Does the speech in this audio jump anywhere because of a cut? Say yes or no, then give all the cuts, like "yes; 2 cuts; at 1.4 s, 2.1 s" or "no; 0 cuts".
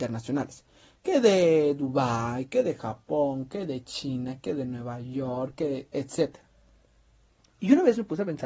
no; 0 cuts